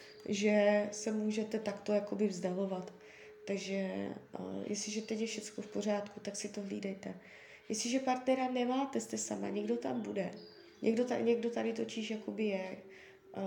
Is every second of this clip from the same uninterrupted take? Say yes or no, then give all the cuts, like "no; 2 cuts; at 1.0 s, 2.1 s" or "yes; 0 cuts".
yes; 0 cuts